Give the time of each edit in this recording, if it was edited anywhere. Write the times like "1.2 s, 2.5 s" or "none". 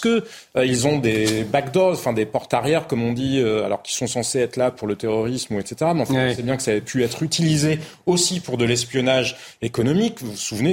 none